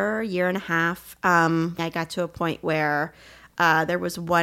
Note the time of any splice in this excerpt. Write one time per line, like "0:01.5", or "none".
0:01.8